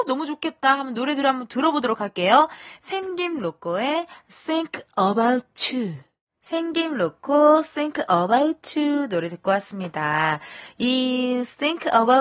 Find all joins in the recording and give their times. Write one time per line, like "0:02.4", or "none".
none